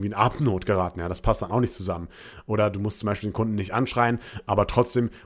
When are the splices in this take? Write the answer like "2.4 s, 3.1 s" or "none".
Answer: none

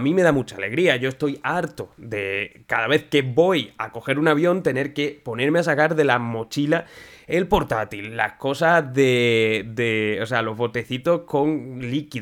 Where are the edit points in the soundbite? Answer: none

